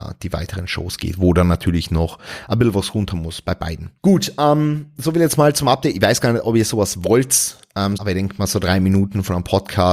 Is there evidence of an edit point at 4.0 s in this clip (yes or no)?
yes